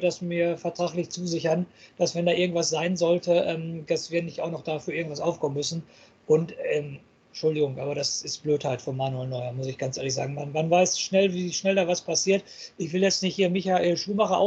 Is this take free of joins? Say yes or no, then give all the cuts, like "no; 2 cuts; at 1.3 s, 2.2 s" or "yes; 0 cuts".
yes; 0 cuts